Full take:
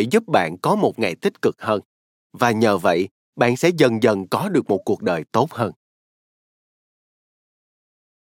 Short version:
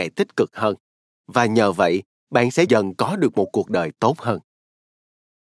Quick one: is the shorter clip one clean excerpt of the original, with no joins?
no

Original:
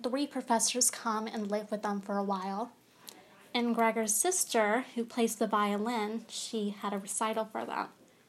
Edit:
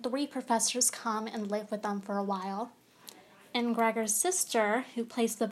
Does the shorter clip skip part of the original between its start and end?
no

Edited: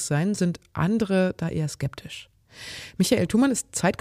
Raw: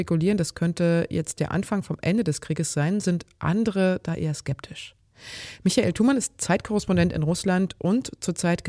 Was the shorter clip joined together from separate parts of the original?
no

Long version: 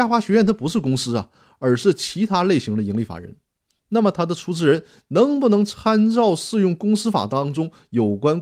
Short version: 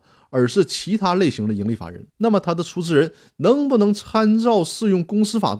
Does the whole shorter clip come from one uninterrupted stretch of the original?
no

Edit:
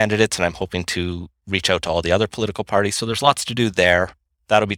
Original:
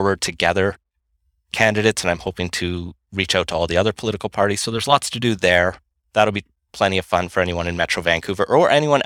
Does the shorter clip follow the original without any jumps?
yes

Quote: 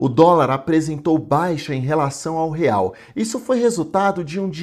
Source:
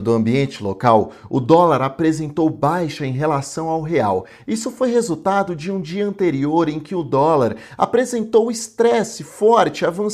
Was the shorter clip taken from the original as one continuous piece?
yes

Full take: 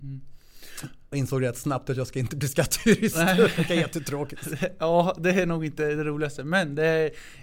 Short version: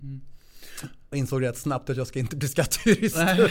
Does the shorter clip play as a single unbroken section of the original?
yes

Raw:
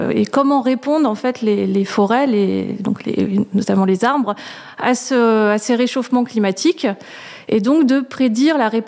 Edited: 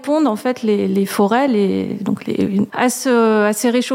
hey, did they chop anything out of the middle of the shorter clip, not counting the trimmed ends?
yes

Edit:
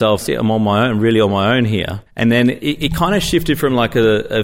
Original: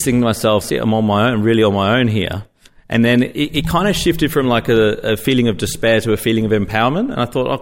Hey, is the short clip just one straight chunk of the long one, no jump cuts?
no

